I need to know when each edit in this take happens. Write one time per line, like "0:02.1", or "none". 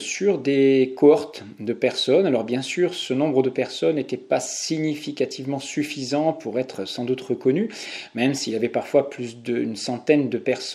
none